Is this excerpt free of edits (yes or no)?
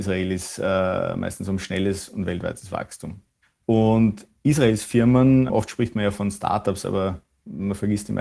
no